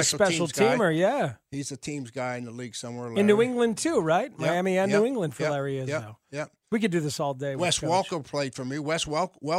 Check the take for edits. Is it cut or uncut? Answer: uncut